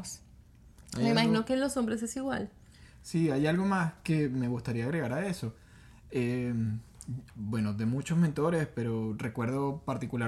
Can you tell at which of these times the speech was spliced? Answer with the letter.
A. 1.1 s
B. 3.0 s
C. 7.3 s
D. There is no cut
C